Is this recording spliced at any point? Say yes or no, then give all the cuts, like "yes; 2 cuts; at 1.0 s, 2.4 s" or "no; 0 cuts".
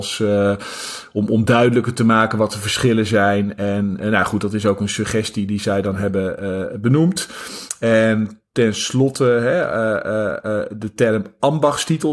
no; 0 cuts